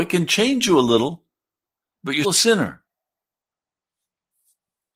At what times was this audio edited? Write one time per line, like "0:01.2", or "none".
0:02.2